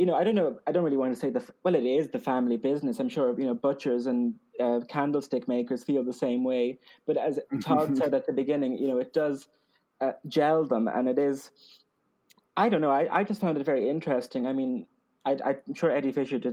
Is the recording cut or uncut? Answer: uncut